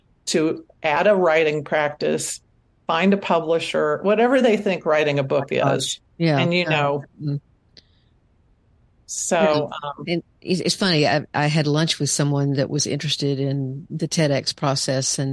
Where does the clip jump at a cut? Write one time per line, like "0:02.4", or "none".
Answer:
none